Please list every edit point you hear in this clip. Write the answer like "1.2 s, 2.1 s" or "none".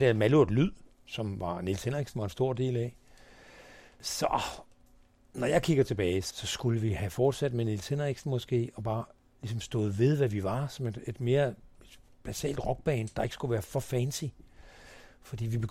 none